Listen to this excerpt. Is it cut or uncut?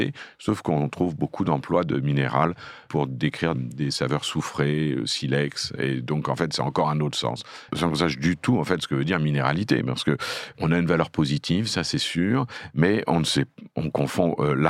cut